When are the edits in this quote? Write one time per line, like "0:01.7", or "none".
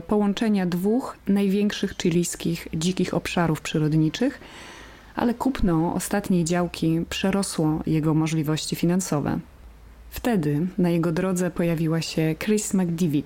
none